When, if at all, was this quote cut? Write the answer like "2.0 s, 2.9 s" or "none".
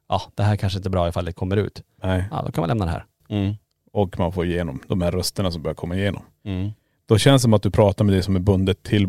3.2 s